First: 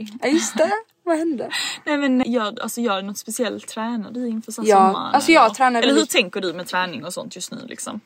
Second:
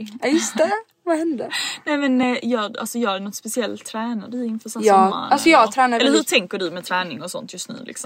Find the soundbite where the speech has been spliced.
first; 1 cut; at 2.2 s

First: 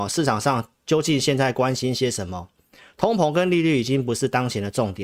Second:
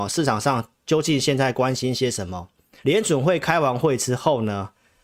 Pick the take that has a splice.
second; 1 cut; at 2.8 s

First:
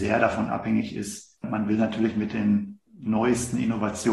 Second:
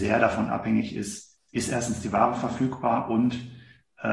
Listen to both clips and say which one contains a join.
first; 2 cuts; at 1.4 s, 2.9 s

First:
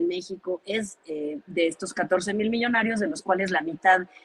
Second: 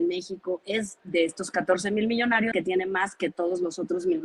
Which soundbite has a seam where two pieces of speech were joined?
second; 2 cuts; at 1.0 s, 2.5 s

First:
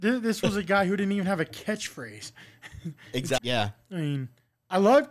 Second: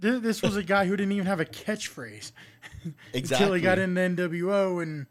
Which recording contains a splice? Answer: first; 1 cut; at 3.4 s

